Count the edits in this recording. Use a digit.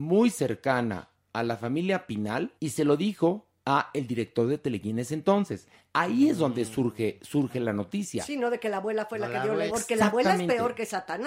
2